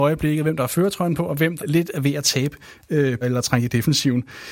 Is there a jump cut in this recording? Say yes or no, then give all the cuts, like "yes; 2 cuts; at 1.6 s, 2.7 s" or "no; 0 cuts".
yes; 2 cuts; at 1.6 s, 3.2 s